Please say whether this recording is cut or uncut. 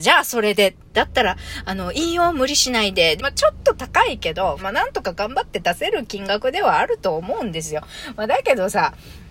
cut